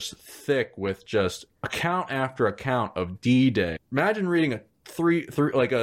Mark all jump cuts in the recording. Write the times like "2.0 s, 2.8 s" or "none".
1.5 s, 3.8 s